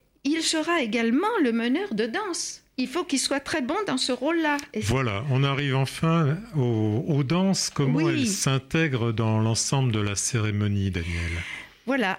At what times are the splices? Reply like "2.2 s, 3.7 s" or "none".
none